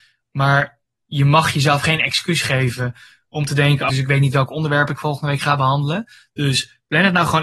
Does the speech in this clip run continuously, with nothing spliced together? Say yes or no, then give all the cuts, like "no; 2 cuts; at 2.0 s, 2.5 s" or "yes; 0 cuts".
no; 1 cut; at 3.9 s